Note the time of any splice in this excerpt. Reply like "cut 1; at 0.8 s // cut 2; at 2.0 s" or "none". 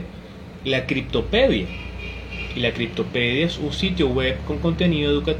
none